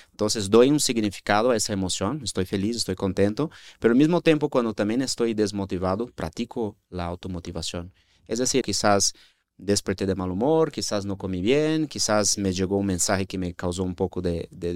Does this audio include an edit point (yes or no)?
yes